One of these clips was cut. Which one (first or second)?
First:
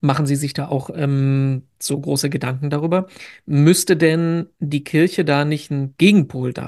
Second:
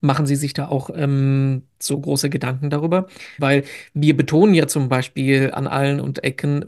second